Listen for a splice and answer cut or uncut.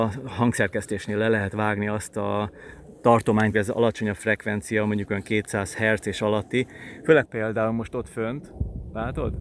cut